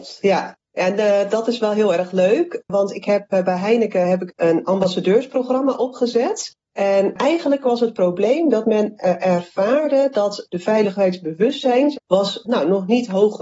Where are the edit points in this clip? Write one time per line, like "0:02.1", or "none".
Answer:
0:11.9